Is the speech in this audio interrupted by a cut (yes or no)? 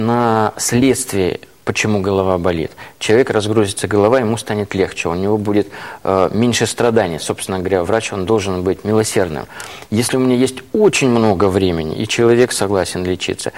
no